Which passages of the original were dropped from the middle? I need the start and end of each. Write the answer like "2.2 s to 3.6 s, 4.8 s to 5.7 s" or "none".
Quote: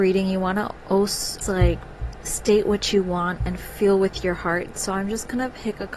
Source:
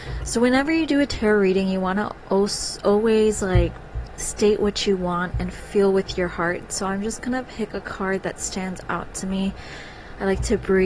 2.8 s to 3.3 s